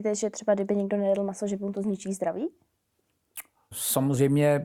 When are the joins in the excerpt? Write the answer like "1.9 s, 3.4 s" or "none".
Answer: 3.7 s